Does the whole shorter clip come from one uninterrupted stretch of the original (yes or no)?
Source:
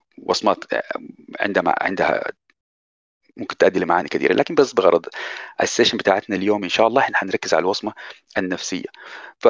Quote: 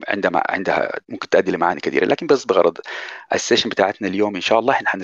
no